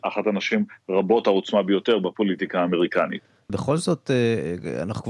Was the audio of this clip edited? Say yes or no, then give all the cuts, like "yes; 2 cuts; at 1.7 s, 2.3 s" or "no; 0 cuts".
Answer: yes; 1 cut; at 3.5 s